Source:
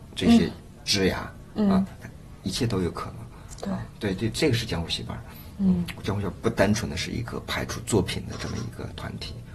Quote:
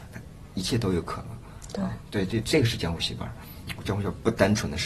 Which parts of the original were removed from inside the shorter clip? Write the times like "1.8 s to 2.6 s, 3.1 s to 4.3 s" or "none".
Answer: 5.6 s to 5.9 s